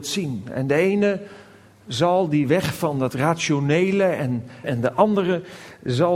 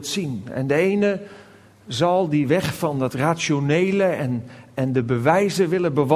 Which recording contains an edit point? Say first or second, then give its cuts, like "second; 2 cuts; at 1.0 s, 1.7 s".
first; 1 cut; at 4.6 s